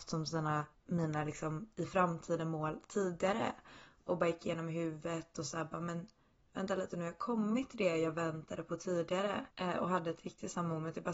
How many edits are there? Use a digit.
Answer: 1